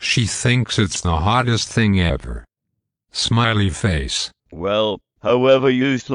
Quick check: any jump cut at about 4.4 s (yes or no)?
yes